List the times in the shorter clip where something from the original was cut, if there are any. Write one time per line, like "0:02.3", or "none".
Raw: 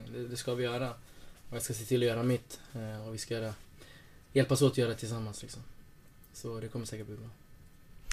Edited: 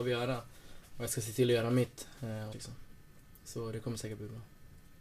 0:02.5